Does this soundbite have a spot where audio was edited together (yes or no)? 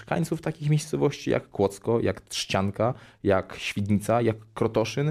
no